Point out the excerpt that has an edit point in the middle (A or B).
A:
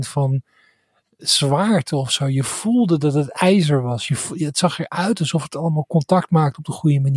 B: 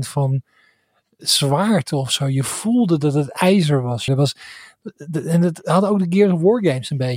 B